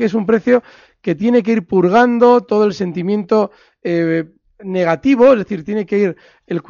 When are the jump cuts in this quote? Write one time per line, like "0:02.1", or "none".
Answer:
none